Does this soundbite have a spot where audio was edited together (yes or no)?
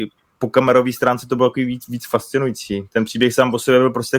no